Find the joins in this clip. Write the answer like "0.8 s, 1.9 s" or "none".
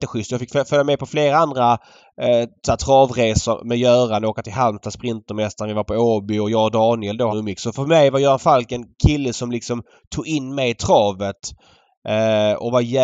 7.3 s

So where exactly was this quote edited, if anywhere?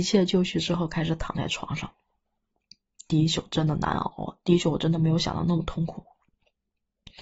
none

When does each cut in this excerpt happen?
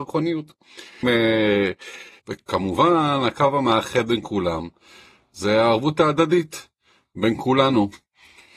1.0 s, 2.2 s

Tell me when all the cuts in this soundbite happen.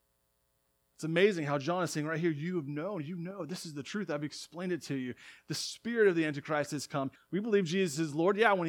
7.1 s

